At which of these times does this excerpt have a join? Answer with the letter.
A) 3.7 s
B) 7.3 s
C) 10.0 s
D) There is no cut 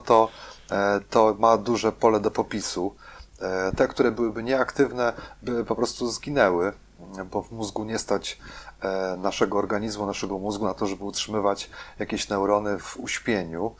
A